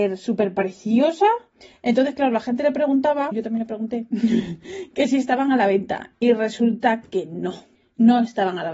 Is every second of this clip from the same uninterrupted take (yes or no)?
no